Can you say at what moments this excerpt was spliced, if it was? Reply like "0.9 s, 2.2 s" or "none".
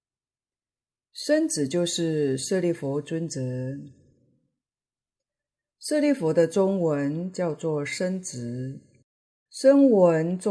9.5 s